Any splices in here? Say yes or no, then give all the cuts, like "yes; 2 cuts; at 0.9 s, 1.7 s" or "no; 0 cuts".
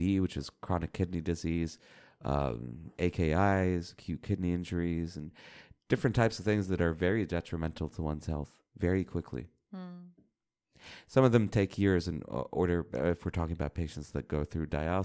no; 0 cuts